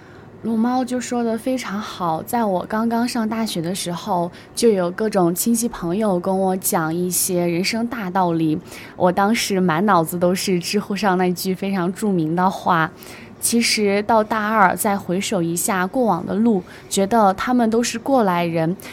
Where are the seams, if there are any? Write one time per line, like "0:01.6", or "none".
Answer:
0:13.4